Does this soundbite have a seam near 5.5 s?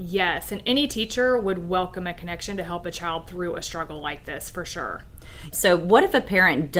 yes; 1 cut; at 5.5 s

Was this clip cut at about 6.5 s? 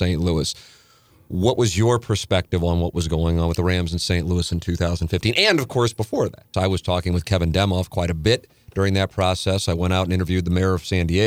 yes; 1 cut; at 6.5 s

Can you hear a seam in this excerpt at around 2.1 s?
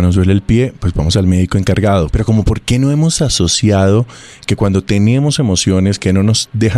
yes; 1 cut; at 2.1 s

